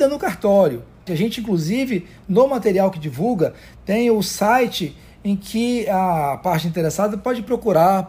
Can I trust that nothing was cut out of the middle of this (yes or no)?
no